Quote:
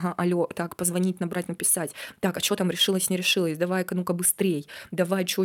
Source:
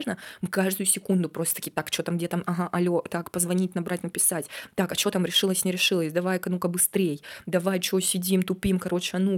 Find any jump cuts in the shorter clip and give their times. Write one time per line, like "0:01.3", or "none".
none